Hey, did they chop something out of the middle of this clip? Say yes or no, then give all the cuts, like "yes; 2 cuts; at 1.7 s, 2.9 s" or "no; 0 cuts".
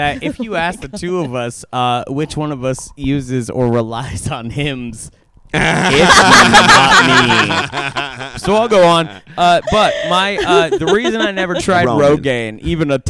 no; 0 cuts